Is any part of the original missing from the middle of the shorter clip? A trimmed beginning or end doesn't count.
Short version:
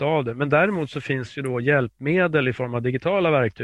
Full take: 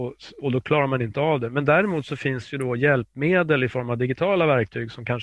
no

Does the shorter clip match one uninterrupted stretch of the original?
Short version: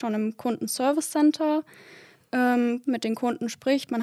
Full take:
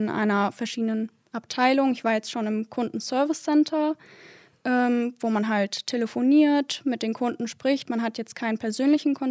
no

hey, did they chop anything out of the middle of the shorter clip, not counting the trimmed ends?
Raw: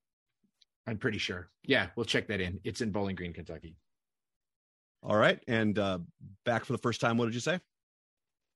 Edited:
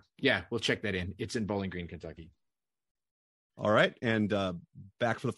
no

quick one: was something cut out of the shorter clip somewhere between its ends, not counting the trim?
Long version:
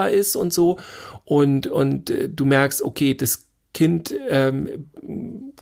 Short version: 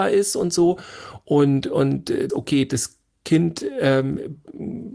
yes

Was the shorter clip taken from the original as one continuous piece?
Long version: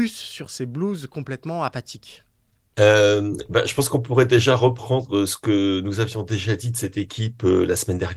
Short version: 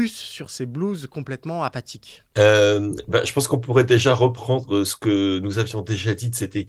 no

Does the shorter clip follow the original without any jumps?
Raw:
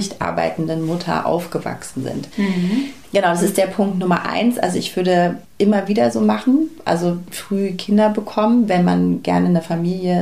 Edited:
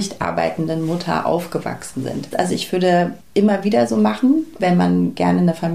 no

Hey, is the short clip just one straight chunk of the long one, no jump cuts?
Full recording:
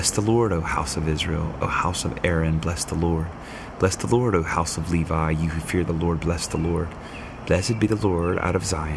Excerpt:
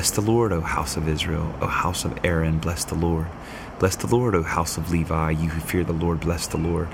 yes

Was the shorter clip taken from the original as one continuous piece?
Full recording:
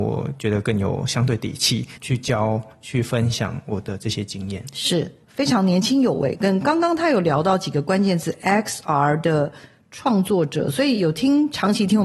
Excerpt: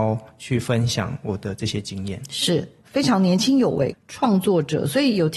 no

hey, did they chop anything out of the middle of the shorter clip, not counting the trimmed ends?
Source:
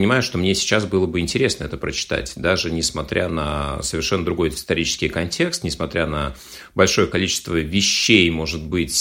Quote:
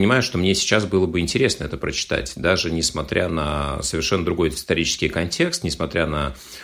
no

